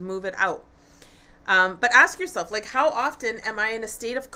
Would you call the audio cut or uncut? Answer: uncut